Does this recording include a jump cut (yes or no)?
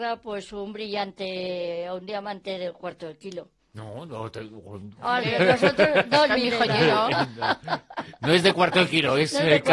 yes